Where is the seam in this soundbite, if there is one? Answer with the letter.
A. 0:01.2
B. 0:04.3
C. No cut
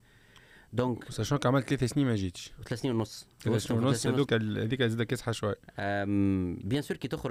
B